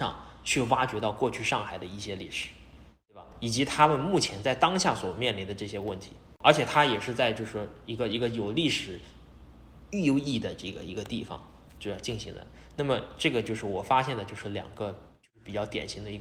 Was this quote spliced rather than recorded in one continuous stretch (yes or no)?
no